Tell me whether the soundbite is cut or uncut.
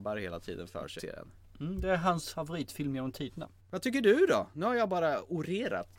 cut